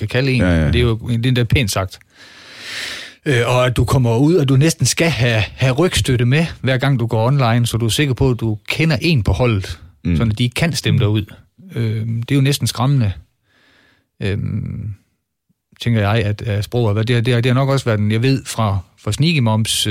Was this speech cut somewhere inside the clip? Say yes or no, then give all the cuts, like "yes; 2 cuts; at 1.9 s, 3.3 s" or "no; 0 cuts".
no; 0 cuts